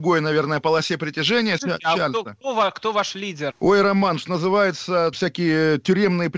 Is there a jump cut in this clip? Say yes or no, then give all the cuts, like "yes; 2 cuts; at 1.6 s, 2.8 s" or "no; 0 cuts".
yes; 3 cuts; at 1.6 s, 3.5 s, 5.1 s